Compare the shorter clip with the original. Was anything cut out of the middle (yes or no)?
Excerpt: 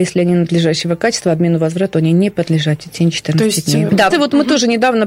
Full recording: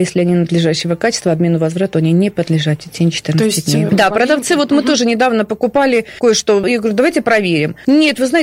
yes